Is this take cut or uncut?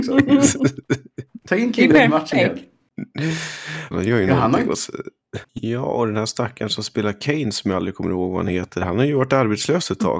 cut